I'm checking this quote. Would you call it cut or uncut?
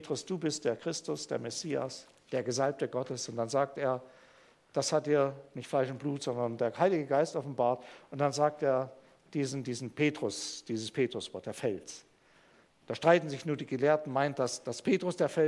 uncut